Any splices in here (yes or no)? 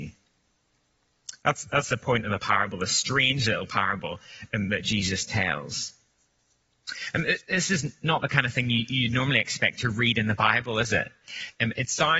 no